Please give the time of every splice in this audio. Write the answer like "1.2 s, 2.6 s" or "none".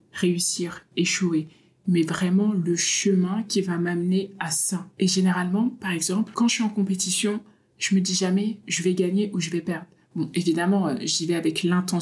none

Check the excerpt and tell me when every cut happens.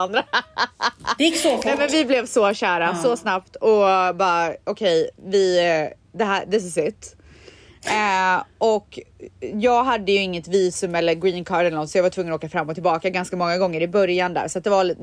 none

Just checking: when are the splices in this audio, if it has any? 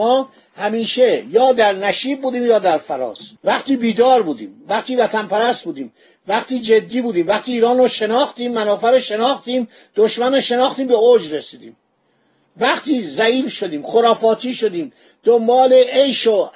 3.4 s

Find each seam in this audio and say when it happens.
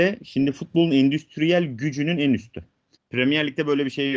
3.0 s

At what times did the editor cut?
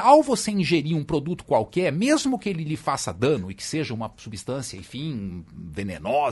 none

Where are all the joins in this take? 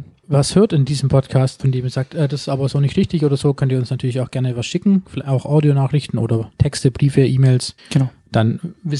7.8 s

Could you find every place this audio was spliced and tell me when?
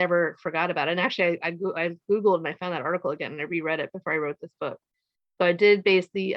none

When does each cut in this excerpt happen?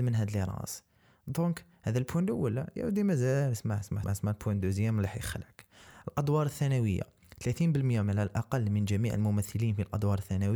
4.0 s

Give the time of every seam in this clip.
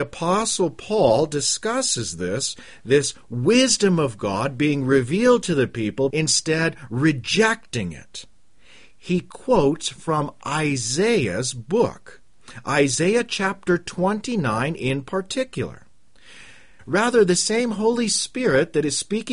6.1 s, 16.8 s

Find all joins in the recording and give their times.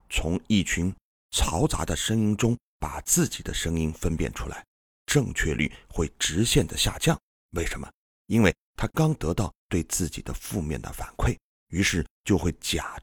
8.9 s

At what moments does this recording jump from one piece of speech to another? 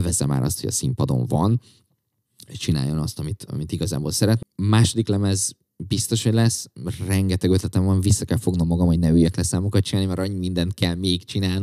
4.4 s

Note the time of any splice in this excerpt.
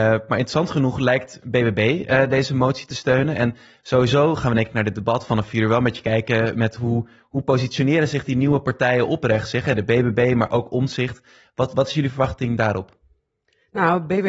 none

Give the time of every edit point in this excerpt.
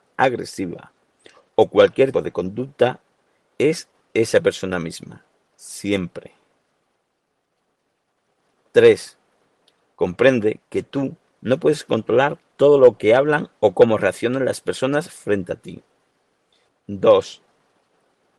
2.1 s, 16.7 s

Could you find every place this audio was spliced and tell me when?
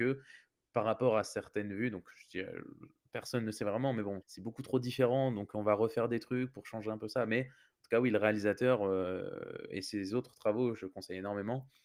4.2 s

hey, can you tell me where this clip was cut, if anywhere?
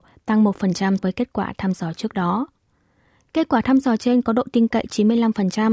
1.0 s

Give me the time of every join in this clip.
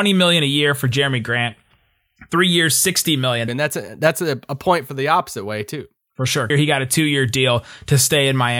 3.5 s, 6.5 s

